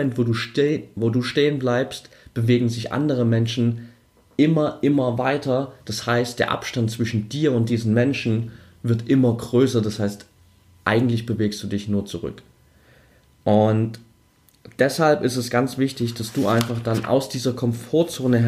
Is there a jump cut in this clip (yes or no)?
no